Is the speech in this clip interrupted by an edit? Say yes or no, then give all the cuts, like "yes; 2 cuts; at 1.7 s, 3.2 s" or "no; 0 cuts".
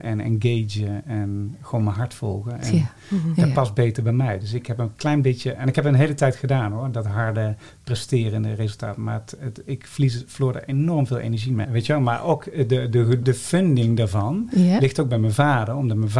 yes; 2 cuts; at 11.6 s, 13.2 s